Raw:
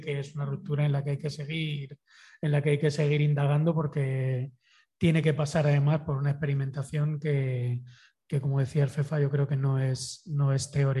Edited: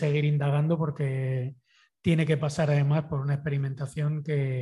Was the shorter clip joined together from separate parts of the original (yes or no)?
no